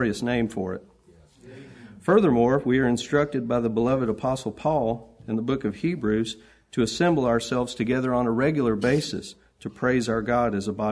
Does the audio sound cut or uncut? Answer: uncut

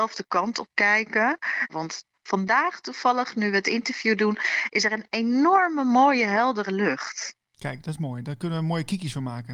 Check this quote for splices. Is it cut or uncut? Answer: cut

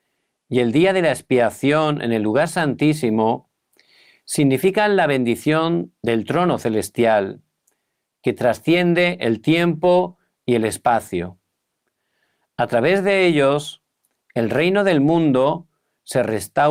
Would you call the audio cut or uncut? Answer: uncut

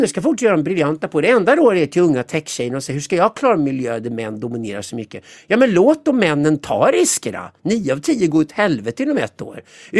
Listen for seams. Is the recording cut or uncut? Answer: uncut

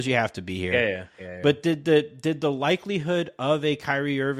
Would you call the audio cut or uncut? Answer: uncut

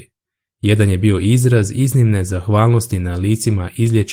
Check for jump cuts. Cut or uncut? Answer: uncut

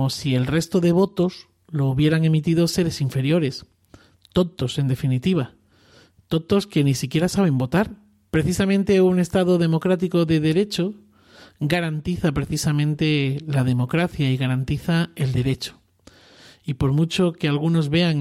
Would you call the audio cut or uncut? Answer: cut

